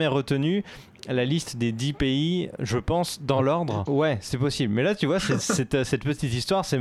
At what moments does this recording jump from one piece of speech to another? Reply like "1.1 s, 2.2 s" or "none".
3.9 s